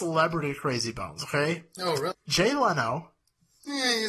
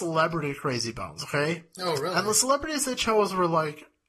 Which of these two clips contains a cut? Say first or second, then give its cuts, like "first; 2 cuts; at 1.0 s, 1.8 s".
first; 1 cut; at 2.1 s